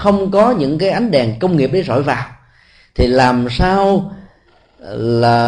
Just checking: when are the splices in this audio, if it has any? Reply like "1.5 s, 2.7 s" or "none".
none